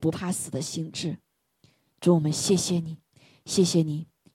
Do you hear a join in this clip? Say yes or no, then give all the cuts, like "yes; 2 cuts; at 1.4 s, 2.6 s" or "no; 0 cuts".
no; 0 cuts